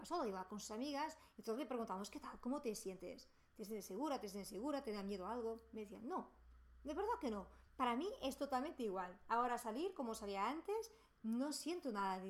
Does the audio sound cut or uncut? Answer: uncut